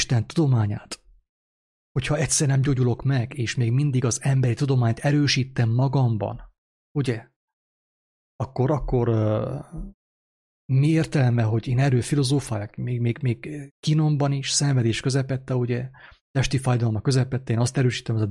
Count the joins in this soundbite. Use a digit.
1